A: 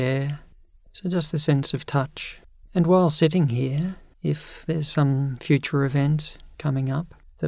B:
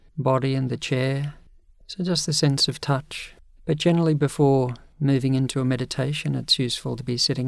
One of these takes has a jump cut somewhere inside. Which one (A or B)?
B